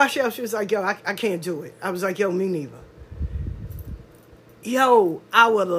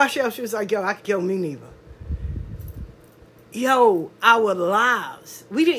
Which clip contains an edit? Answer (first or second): second